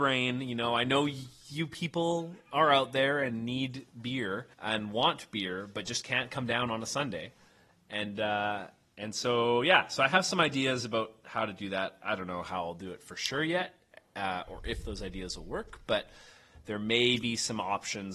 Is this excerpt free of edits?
no; 1 cut; at 4.5 s

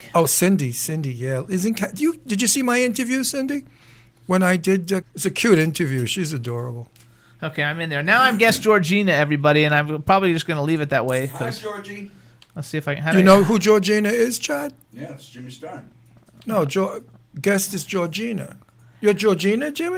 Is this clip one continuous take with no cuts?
no; 1 cut; at 5.0 s

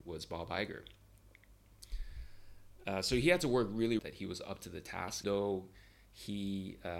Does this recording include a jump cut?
yes; 2 cuts; at 4.0 s, 5.2 s

